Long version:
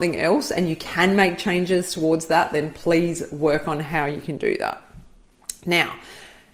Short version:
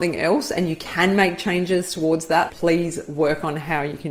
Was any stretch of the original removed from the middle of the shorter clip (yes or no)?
yes